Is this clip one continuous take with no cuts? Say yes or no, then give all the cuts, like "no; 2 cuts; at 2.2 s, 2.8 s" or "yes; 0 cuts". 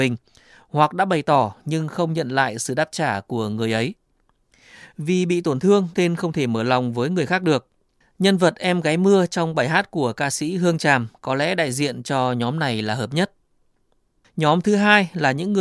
yes; 0 cuts